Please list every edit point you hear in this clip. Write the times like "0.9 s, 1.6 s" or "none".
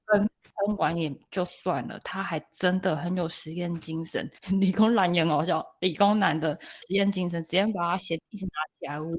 4.4 s